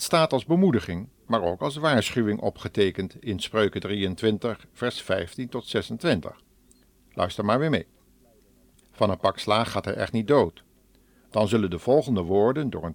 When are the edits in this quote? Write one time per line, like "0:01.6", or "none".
0:08.8
0:11.2